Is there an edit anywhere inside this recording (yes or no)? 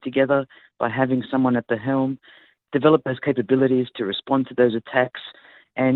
no